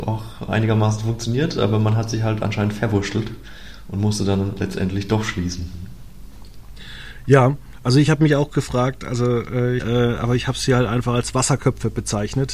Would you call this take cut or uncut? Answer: cut